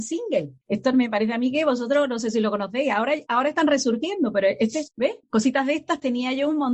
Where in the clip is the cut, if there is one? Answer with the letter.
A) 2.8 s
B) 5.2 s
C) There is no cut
C